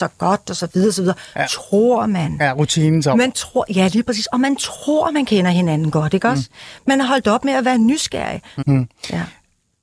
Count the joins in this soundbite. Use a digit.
1